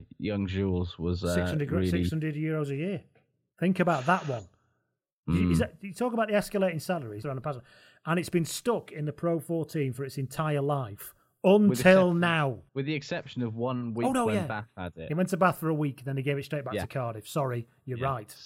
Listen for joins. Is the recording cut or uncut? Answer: cut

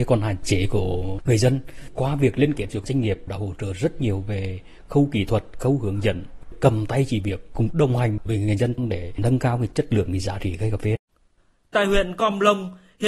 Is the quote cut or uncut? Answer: uncut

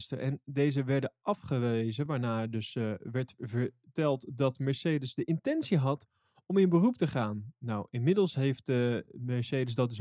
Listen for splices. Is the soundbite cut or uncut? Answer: uncut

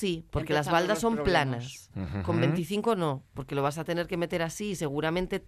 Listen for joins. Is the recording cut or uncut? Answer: uncut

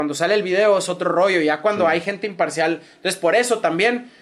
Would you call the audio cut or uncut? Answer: uncut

